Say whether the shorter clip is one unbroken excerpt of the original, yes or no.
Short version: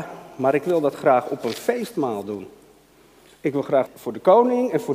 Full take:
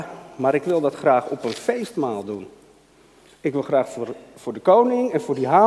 no